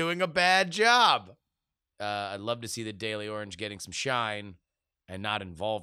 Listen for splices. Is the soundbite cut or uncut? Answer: cut